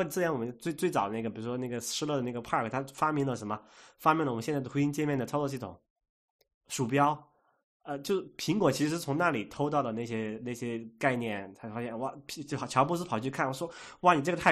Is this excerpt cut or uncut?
uncut